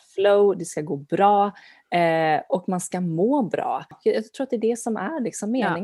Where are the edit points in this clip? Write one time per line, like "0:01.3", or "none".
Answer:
none